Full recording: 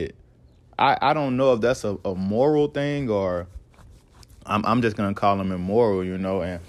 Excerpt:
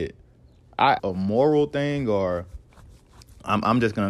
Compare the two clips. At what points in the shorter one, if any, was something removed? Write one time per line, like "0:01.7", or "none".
0:01.0